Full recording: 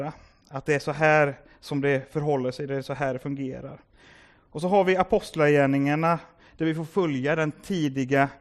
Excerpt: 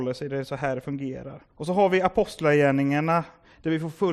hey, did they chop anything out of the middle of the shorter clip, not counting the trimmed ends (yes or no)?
yes